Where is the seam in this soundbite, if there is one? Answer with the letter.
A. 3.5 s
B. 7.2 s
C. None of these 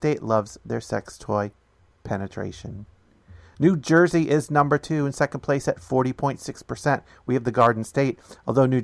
C